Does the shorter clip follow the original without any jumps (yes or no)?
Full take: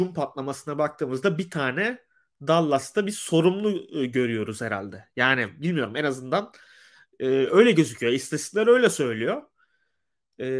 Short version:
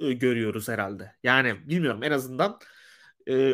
yes